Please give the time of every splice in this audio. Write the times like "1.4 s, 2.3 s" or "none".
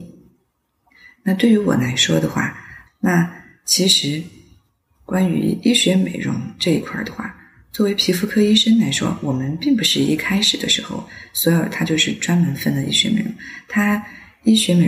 2.9 s